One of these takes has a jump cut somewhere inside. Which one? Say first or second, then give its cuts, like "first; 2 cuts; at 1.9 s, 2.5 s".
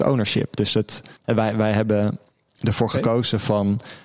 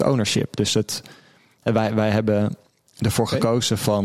first; 1 cut; at 1.2 s